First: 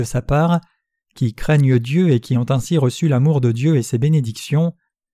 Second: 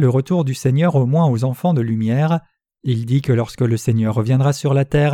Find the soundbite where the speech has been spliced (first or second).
second